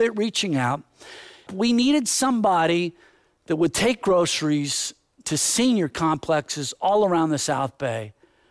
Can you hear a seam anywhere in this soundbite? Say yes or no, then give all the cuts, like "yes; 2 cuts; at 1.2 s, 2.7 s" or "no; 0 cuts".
yes; 1 cut; at 1.5 s